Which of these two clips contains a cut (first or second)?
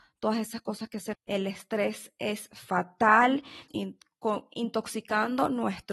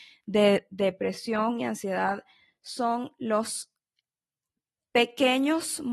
first